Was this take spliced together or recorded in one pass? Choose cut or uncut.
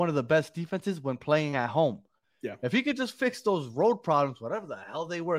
uncut